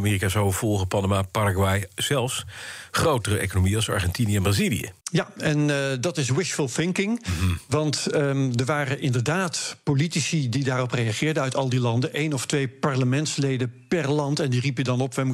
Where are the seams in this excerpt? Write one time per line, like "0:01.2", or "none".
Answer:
0:05.0

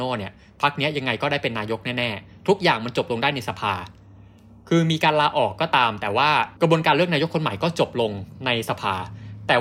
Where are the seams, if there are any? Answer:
0:06.6

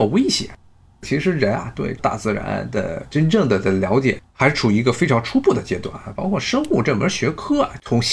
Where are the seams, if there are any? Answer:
0:00.9

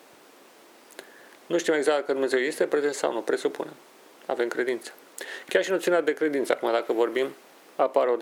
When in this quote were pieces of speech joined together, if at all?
none

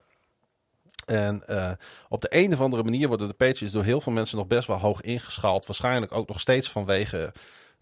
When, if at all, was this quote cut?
none

